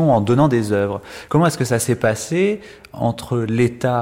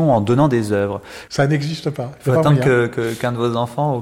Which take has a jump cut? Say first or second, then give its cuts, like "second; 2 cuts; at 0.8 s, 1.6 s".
second; 1 cut; at 1.3 s